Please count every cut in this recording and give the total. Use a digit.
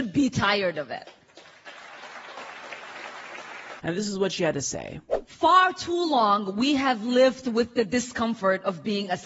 1